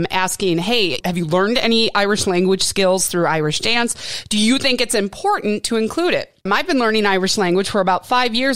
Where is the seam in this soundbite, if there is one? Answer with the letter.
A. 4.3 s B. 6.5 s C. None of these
B